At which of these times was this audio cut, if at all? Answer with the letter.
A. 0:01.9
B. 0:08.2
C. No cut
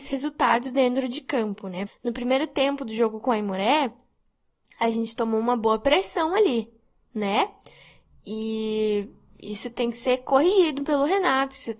A